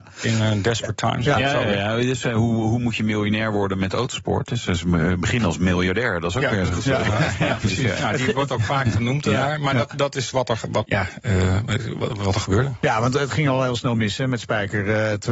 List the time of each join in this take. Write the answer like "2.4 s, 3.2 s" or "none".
10.9 s